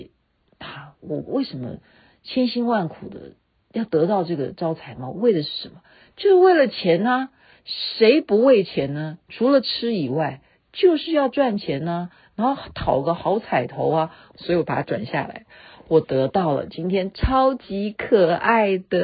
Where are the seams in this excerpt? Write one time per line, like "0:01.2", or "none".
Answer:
0:14.3